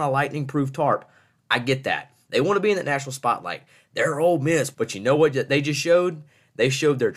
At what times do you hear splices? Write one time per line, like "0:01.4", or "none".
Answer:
0:02.3
0:04.7